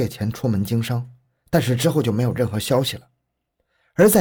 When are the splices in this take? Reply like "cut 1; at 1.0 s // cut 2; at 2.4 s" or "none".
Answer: none